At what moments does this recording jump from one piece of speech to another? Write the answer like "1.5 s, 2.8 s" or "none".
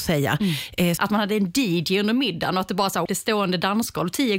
1.0 s, 3.1 s

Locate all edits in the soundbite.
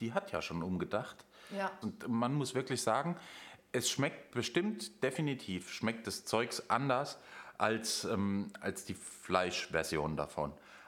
1.8 s

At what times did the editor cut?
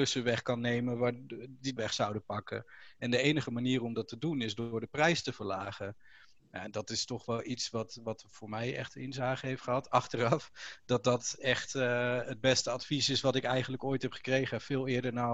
1.8 s

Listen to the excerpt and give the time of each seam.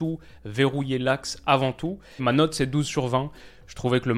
2.2 s

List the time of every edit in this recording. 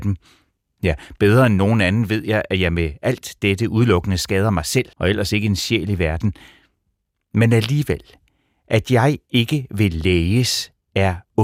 4.9 s

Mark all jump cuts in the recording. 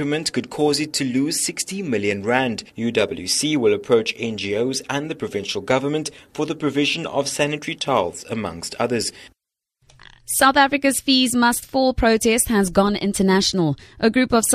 2.7 s

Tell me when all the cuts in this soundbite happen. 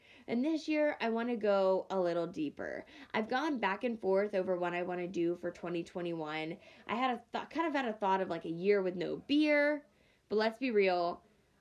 none

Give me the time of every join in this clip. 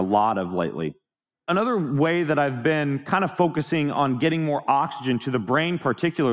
none

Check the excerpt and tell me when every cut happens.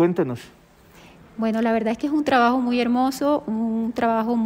none

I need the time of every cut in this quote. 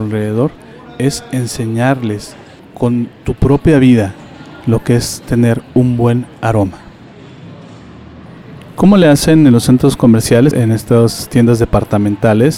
2.6 s, 10.5 s

